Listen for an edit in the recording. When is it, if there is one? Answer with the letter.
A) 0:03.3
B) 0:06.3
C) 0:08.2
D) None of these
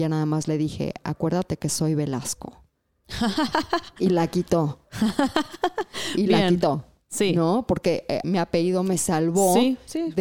C